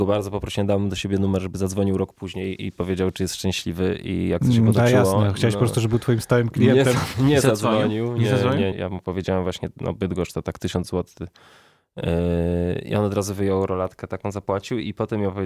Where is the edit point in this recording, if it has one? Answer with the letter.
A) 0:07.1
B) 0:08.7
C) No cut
B